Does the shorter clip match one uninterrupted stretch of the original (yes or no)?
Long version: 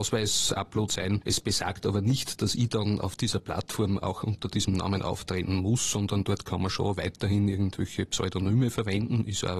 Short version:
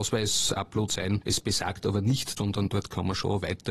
no